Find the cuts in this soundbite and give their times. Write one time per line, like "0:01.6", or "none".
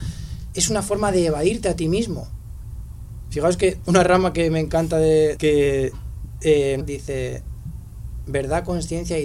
0:05.4
0:06.8